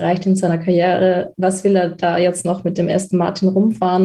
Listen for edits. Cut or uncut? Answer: uncut